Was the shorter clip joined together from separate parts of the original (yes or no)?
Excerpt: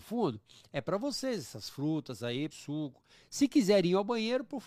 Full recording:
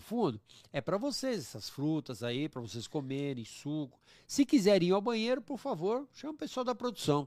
yes